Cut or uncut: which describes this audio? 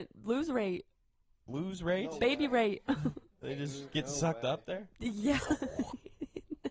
uncut